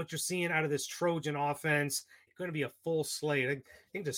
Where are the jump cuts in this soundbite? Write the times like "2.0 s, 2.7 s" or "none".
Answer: 2.3 s